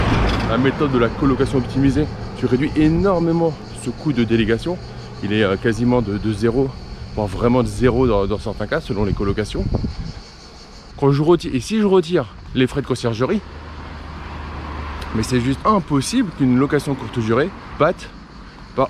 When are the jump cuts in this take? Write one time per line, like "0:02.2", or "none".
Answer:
0:10.9
0:15.6
0:17.8